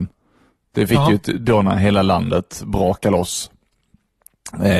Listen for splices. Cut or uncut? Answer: uncut